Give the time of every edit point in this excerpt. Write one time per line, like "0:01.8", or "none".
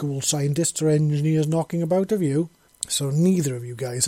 0:02.7